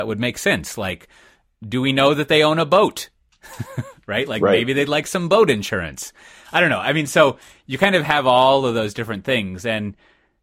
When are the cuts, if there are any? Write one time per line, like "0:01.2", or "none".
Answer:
none